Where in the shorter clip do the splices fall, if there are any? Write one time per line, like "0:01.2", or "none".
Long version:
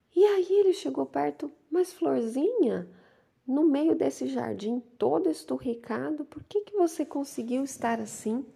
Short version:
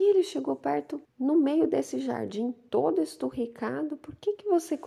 0:01.1